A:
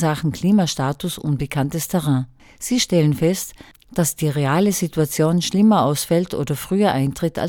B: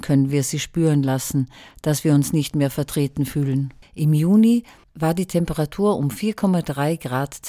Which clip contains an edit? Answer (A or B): B